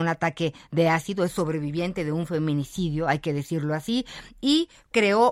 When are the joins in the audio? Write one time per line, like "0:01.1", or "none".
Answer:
none